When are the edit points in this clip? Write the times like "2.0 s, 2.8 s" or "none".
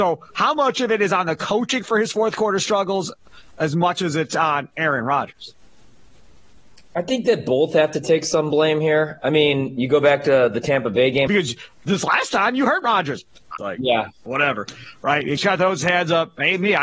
11.3 s, 13.6 s, 15.4 s